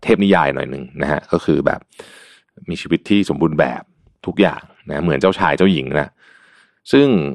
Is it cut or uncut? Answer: uncut